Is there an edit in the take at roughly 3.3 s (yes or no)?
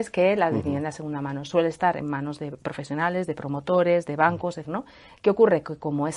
no